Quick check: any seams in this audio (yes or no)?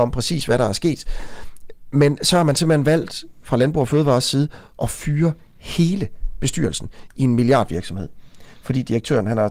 no